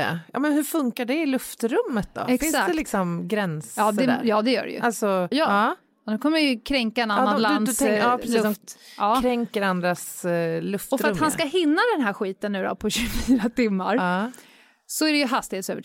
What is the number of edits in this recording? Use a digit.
1